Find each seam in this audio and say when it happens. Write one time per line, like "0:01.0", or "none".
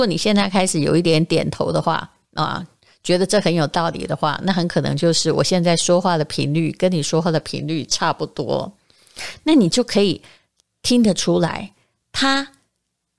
none